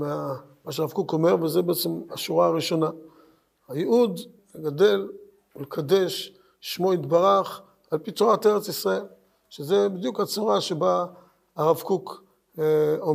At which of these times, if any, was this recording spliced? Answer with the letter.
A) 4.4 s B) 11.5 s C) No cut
A